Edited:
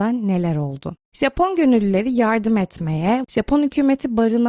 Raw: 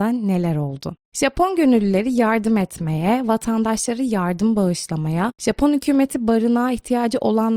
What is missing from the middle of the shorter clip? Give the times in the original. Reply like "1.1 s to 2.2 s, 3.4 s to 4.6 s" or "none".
3.2 s to 5.3 s